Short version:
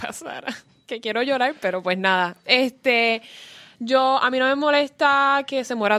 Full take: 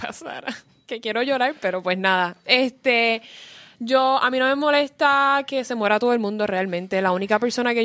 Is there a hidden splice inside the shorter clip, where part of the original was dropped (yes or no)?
no